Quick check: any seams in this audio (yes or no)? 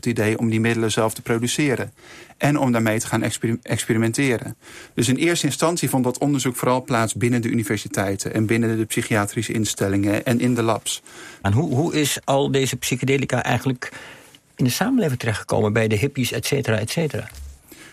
yes